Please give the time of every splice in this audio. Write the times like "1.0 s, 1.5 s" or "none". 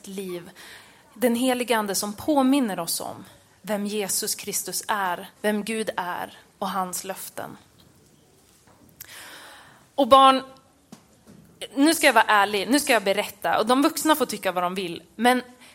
5.4 s